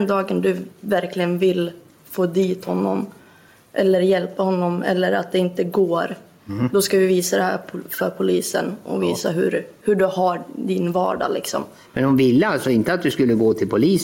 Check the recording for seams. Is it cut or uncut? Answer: uncut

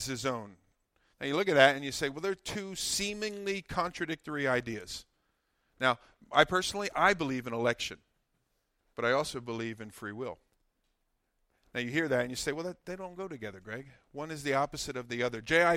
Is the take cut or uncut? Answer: cut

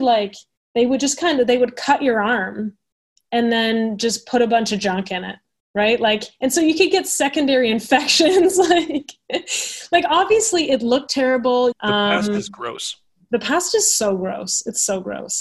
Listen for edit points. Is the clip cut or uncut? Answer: cut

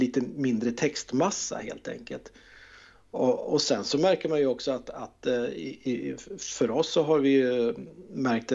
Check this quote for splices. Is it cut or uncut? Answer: uncut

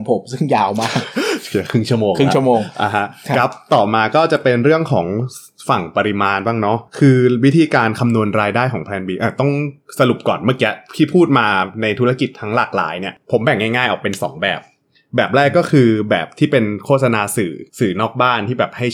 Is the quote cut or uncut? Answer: cut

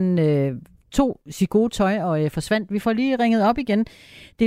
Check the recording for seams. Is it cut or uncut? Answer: uncut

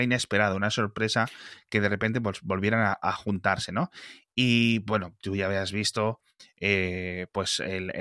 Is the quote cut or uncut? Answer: uncut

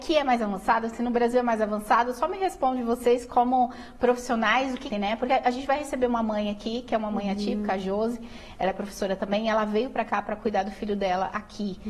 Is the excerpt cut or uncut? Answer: cut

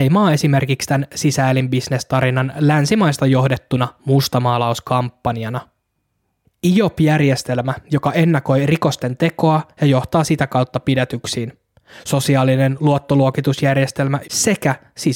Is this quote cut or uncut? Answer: cut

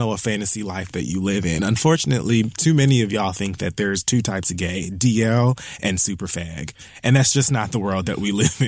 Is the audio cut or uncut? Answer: uncut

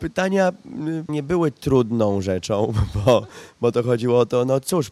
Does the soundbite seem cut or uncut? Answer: cut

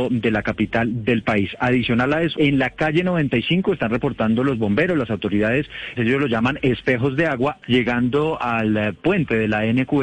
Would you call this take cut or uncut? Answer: cut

